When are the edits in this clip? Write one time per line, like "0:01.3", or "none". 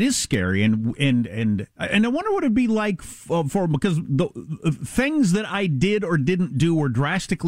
none